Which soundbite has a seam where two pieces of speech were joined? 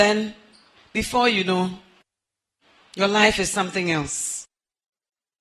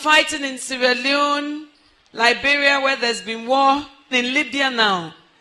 second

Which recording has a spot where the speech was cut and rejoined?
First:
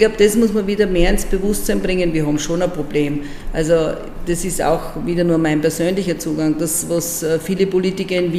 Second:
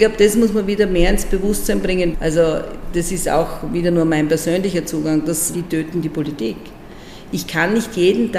second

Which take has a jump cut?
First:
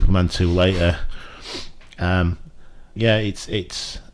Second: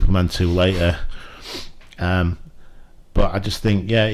first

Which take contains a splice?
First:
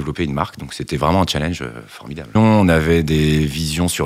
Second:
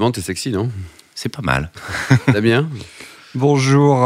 first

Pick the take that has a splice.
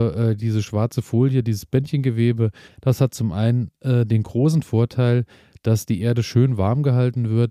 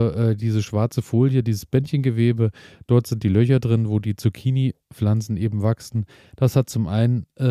first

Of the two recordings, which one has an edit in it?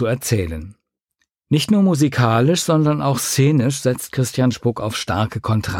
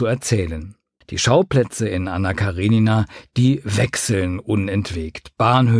second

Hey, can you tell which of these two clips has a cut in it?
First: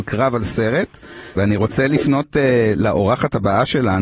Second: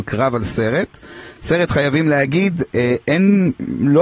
first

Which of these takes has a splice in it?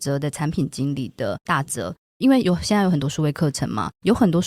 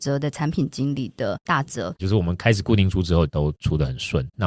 second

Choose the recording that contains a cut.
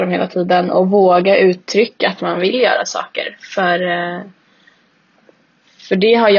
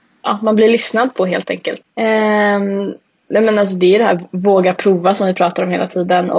second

